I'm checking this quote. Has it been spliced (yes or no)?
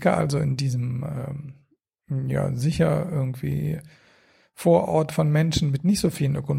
no